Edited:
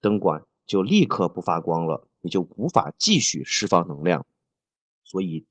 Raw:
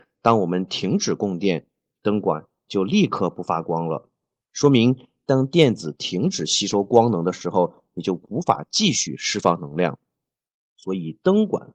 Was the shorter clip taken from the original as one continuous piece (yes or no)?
no